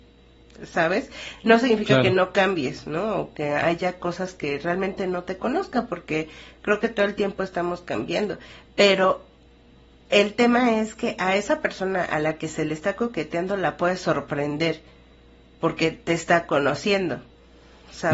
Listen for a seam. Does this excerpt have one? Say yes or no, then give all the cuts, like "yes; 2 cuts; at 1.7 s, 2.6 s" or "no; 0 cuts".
no; 0 cuts